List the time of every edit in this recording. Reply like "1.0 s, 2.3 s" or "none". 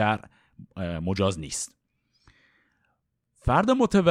none